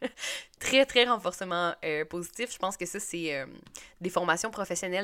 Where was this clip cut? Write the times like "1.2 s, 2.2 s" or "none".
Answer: none

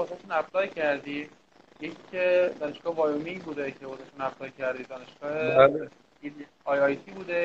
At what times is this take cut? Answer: none

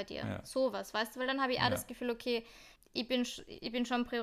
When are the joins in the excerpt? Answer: 2.8 s

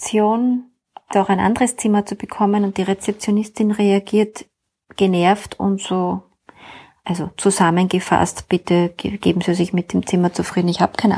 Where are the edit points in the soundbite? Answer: 1.1 s

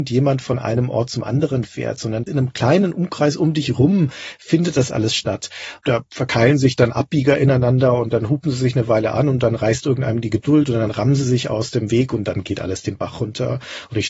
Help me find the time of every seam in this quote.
5.8 s

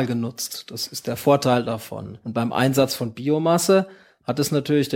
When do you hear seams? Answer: 2.2 s

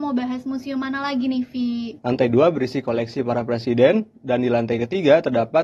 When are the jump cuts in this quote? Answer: 2.0 s

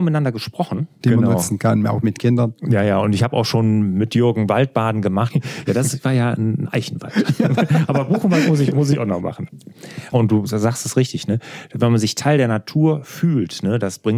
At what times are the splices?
1.0 s, 5.3 s, 10.1 s

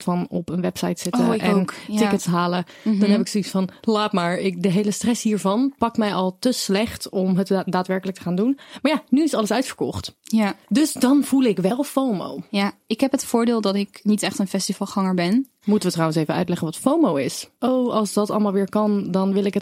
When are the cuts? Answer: 10.6 s, 15.6 s, 17.6 s

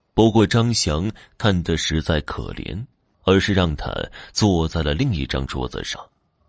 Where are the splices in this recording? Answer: 3.1 s

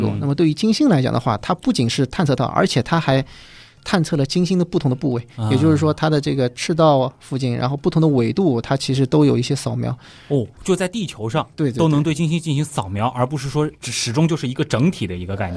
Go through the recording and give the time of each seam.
10.6 s

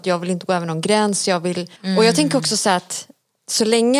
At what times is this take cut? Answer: 1.8 s

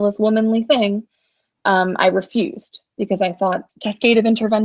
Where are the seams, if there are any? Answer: 3.7 s

